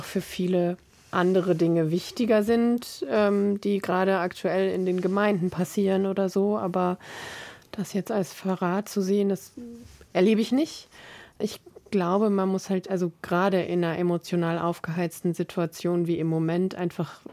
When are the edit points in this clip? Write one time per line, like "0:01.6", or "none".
0:10.1

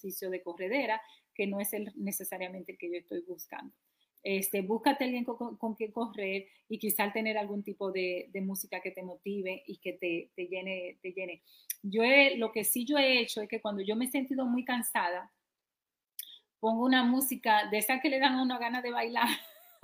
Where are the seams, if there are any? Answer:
0:04.1

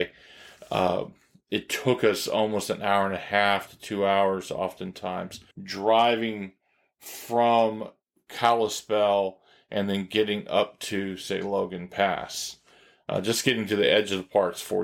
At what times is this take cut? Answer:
0:05.5

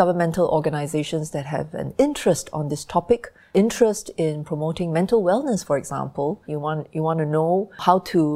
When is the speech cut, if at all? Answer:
0:06.4

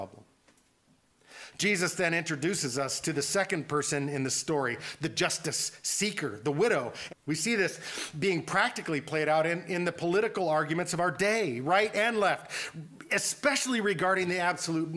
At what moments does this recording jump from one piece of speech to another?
0:07.1

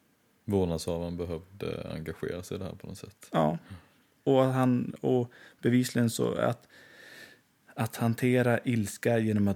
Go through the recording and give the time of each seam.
none

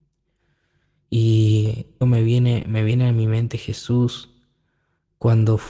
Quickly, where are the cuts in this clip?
0:02.0

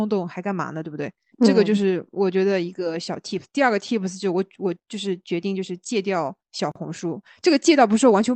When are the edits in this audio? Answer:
0:01.3

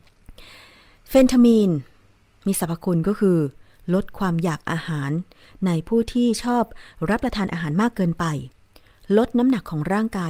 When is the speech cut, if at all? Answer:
none

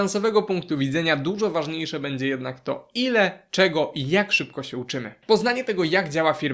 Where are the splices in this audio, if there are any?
none

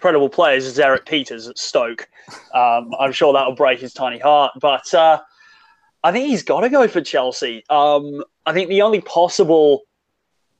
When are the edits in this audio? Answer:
none

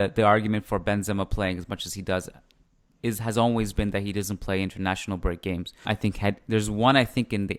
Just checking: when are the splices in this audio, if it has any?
0:05.8

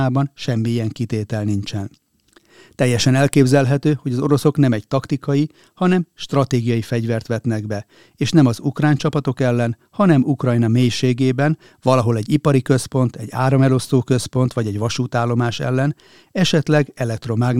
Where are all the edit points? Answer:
none

